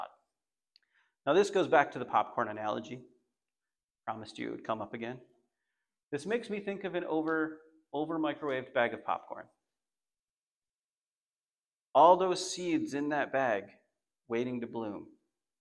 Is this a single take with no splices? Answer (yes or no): yes